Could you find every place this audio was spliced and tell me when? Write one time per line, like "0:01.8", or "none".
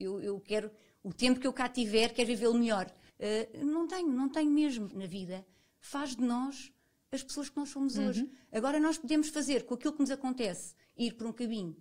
0:03.1
0:04.9